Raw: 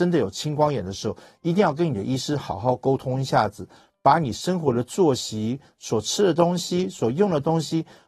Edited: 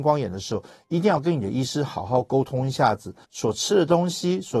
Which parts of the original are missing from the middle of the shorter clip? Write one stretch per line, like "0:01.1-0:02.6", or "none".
0:03.8-0:05.7